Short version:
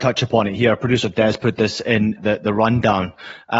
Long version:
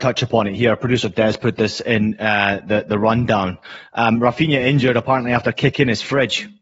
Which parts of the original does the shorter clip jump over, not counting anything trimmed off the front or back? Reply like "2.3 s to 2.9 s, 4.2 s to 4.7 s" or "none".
2.2 s to 2.6 s